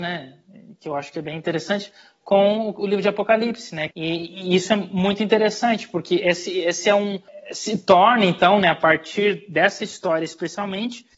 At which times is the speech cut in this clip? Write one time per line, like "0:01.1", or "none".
0:03.9